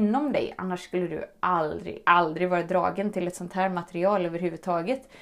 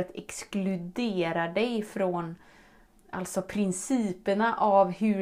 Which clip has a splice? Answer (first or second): first